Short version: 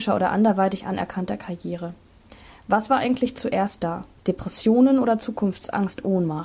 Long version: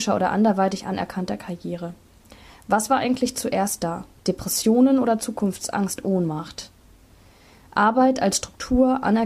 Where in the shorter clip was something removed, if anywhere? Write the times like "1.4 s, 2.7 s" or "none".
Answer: none